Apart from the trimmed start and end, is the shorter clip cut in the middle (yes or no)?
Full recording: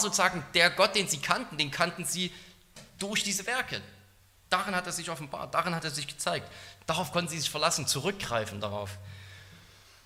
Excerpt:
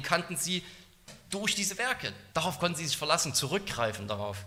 yes